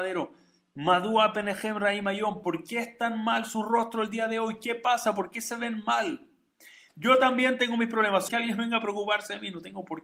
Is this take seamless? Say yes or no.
no